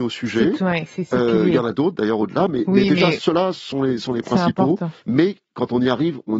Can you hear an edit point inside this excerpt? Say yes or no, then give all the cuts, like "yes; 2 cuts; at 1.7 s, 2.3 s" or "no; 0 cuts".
yes; 1 cut; at 5.0 s